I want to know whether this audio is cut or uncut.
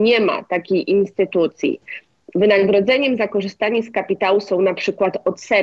uncut